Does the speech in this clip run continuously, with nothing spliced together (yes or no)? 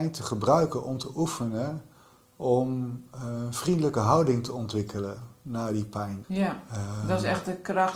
no